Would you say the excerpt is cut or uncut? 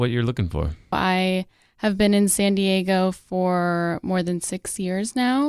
cut